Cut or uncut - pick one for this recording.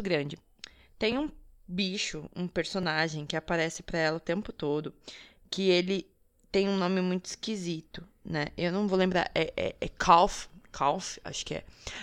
uncut